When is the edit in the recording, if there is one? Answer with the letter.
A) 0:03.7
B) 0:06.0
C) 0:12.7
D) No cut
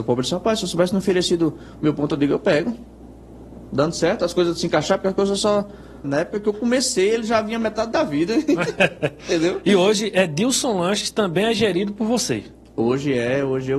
B